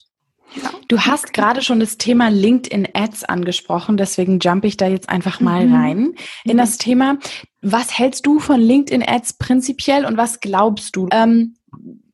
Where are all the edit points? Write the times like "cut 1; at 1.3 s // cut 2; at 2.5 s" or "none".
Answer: cut 1; at 11.1 s